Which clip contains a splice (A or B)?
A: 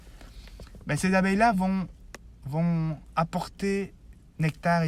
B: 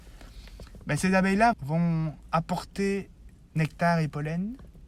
B